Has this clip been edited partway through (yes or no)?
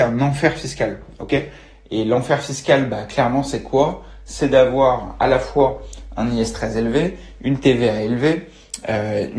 no